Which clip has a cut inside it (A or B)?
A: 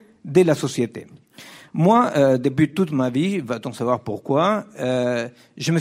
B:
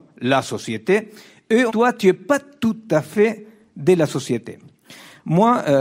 B